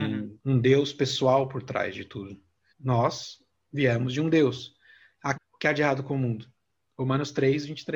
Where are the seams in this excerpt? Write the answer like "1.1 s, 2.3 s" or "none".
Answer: 2.7 s, 5.3 s